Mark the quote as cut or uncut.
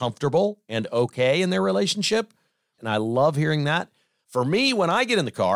cut